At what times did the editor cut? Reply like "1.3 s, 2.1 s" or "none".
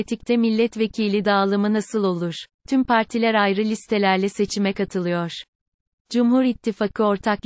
2.6 s

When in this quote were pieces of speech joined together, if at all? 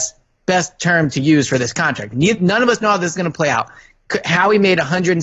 2.1 s

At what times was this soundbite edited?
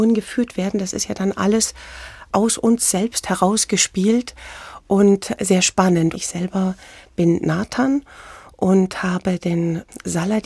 6.1 s

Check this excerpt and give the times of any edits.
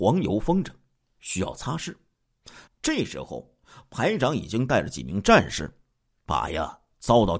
2.7 s

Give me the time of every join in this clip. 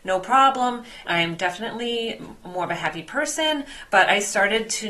1.1 s

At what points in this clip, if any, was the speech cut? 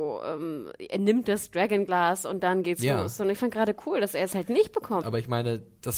5.0 s

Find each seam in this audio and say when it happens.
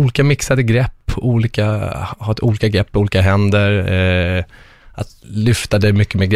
5.2 s

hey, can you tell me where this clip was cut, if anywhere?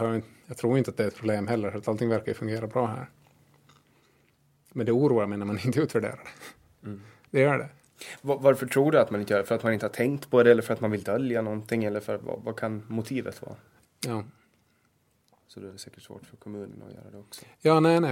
13.8 s

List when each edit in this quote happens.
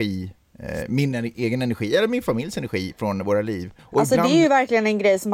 3.8 s

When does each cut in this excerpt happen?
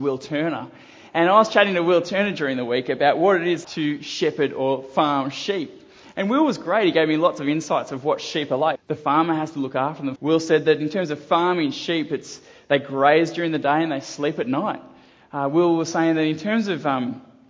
3.6 s, 8.8 s, 10.2 s

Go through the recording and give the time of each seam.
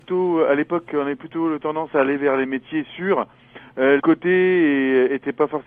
4.0 s

